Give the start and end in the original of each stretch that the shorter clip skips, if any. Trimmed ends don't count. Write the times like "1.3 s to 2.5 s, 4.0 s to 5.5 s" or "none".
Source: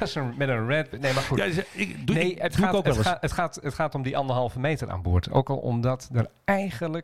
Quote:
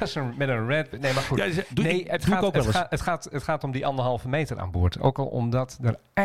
1.7 s to 2.0 s